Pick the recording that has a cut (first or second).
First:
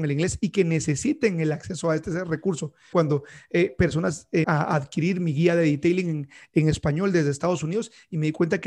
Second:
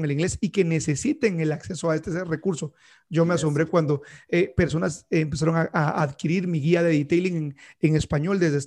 first